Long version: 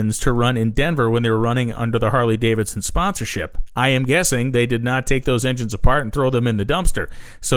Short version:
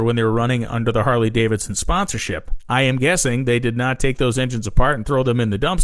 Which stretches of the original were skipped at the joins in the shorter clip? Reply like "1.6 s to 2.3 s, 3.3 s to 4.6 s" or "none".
none

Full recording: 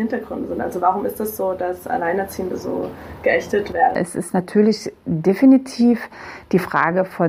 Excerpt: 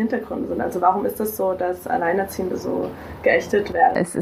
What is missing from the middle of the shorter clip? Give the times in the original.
none

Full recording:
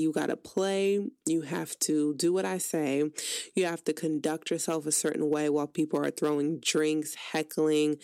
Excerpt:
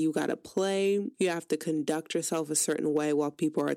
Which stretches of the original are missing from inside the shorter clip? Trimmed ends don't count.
1.1 s to 3.5 s

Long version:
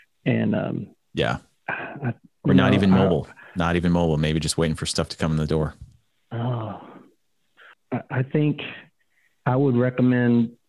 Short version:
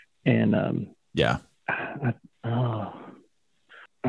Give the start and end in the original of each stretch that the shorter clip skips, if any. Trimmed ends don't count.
2.3 s to 6.2 s

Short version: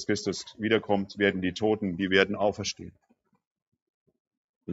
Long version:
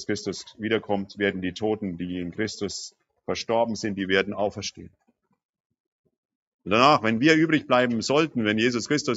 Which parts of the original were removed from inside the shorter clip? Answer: 2.0 s to 4.0 s

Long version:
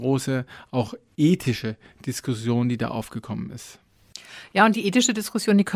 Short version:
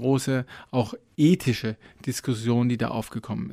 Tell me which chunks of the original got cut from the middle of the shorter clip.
none

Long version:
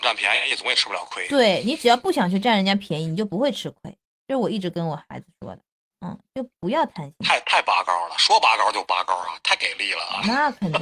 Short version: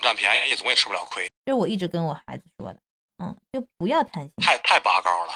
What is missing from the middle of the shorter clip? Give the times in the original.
1.3 s to 4.1 s

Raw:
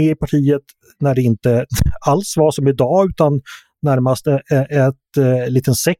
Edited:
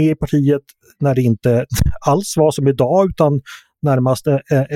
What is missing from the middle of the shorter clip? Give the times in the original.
none

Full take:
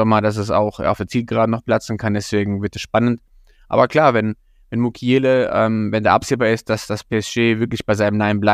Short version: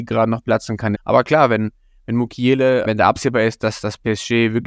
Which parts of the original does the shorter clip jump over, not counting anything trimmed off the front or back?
2.1 s to 3.6 s, 5.5 s to 5.9 s

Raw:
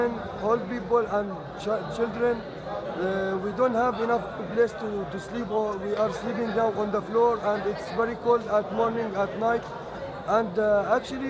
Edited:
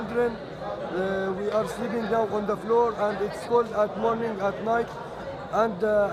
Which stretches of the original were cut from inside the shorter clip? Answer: 3.4 s to 5.8 s, 7.9 s to 8.2 s

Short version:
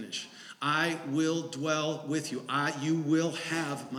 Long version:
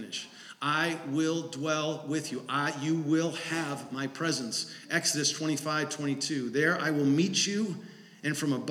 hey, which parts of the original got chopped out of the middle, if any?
none

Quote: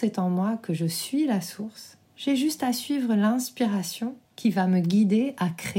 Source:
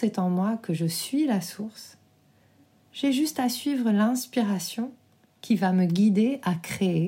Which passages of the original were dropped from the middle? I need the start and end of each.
2.1 s to 2.8 s, 5.0 s to 5.3 s

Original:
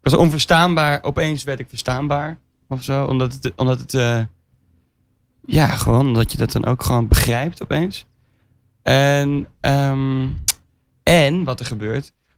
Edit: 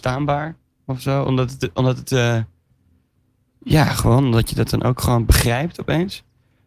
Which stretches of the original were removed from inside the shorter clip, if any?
none

